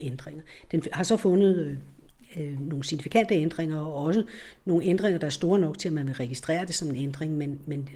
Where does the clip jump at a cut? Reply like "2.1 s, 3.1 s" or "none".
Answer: none